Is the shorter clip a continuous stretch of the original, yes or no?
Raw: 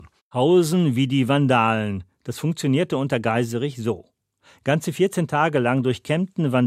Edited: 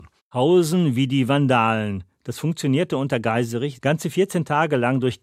no